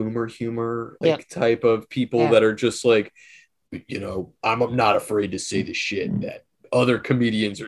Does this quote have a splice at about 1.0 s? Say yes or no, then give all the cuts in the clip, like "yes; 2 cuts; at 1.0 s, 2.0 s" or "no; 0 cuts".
yes; 1 cut; at 1.0 s